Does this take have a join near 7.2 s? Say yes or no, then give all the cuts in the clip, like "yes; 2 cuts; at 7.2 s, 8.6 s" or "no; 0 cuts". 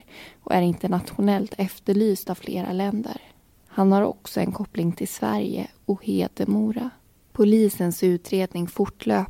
yes; 1 cut; at 7.2 s